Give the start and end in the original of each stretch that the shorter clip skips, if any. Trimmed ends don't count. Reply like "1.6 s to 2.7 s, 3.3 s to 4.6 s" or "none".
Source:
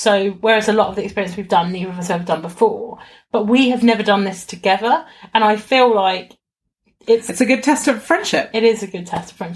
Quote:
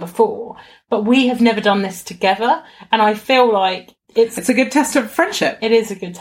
6.5 s to 7.0 s